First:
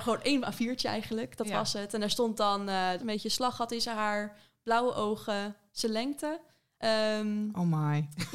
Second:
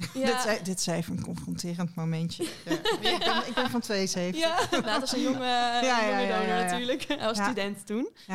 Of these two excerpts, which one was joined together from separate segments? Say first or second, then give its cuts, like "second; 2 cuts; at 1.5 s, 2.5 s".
first; 2 cuts; at 3.0 s, 6.8 s